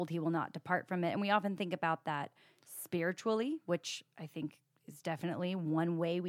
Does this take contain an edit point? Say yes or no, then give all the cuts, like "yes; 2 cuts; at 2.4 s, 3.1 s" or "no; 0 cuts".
no; 0 cuts